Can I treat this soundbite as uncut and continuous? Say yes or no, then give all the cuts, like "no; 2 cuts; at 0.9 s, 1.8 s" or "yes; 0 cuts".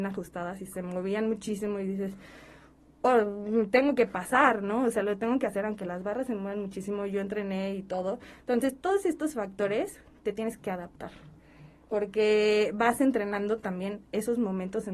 no; 1 cut; at 11.8 s